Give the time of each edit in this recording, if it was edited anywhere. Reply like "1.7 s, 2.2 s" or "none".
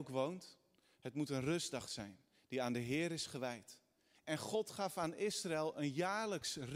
4.1 s